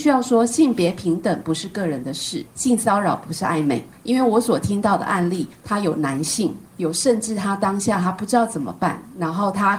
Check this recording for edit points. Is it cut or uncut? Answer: cut